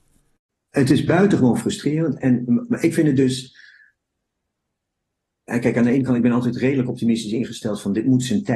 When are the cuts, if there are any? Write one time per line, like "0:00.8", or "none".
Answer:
none